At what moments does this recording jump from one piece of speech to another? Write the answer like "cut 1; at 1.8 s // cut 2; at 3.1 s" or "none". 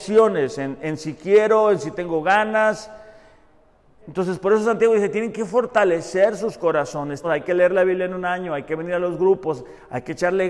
cut 1; at 4.0 s // cut 2; at 7.2 s